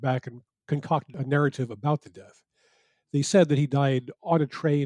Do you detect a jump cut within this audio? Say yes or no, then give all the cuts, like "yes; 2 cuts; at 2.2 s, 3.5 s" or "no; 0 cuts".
no; 0 cuts